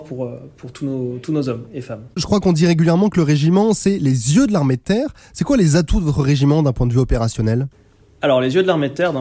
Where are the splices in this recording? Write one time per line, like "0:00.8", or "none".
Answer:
0:02.2